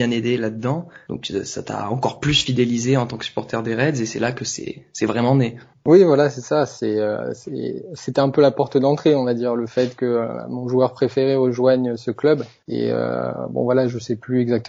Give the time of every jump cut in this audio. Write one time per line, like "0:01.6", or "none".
none